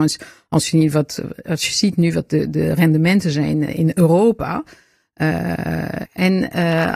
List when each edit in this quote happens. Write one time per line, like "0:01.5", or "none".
0:03.7
0:06.1